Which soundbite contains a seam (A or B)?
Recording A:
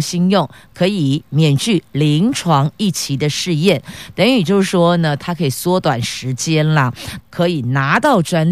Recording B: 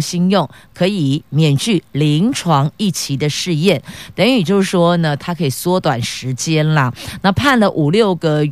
A